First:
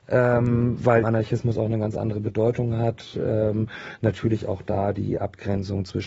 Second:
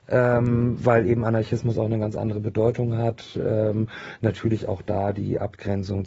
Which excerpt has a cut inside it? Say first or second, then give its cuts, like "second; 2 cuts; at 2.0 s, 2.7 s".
first; 1 cut; at 1.0 s